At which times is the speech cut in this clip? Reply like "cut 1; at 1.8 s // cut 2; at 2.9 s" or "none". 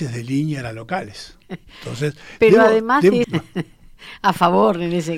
cut 1; at 1.4 s // cut 2; at 3.2 s

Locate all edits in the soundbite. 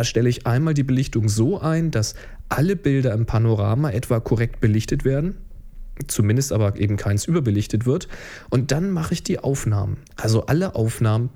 cut 1; at 10.1 s

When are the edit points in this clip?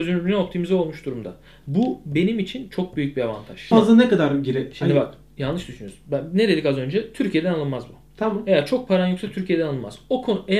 cut 1; at 3.7 s

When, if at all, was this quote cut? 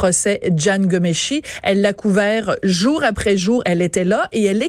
none

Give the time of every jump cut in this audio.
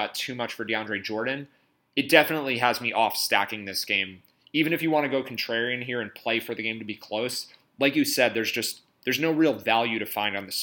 none

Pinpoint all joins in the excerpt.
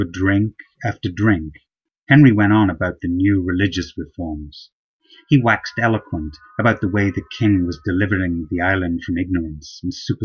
none

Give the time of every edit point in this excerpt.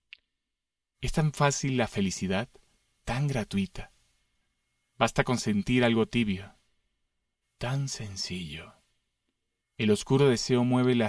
cut 1; at 0.9 s // cut 2; at 7.4 s // cut 3; at 9.6 s

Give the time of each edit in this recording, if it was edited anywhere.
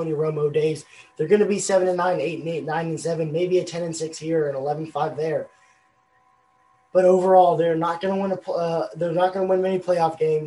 none

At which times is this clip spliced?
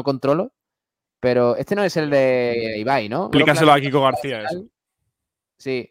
cut 1; at 3.3 s

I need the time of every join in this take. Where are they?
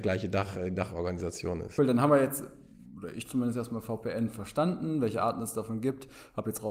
cut 1; at 1.8 s

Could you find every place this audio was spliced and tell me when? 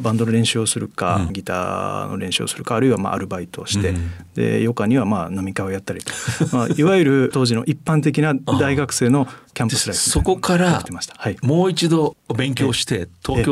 none

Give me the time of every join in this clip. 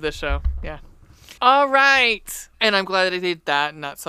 cut 1; at 1.4 s // cut 2; at 2.5 s

